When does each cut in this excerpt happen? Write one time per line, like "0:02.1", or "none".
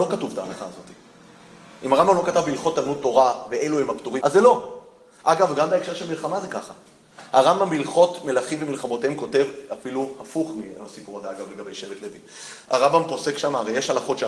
0:04.2